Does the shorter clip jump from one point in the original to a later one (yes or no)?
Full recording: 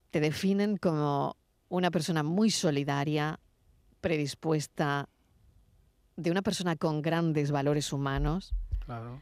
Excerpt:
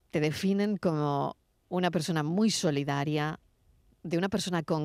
yes